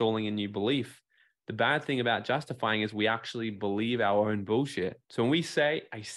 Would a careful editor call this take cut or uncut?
cut